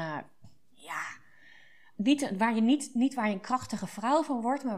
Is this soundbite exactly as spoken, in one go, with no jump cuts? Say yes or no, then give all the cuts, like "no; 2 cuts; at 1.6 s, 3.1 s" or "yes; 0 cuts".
yes; 0 cuts